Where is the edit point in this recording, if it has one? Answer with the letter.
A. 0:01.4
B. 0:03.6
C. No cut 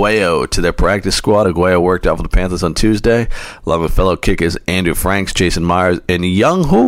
C